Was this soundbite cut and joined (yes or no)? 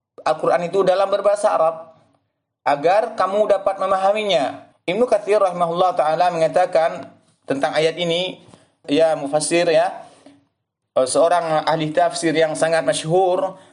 yes